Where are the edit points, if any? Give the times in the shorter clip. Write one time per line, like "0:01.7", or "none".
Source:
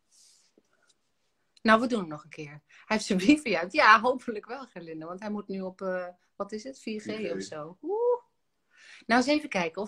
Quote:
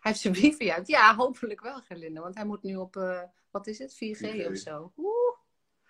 none